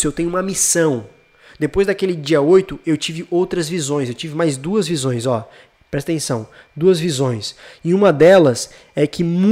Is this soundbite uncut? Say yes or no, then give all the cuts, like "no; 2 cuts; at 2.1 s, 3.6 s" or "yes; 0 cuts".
yes; 0 cuts